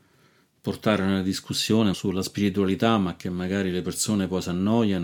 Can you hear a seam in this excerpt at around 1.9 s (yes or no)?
yes